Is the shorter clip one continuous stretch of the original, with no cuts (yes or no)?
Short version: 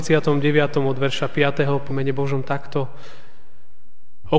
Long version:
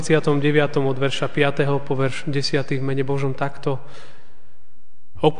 no